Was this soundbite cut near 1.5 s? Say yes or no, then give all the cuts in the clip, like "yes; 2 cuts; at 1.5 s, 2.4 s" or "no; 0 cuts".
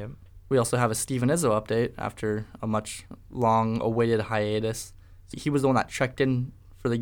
no; 1 cut; at 5.3 s